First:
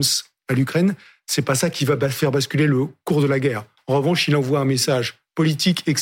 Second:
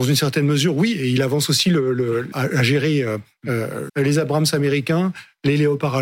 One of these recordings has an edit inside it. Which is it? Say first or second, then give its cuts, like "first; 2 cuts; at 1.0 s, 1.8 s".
second; 2 cuts; at 2.3 s, 3.9 s